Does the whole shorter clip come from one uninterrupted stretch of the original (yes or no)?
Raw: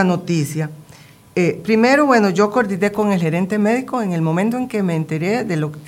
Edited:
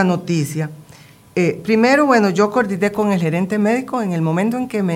yes